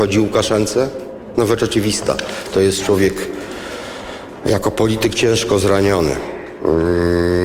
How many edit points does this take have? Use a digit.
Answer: 0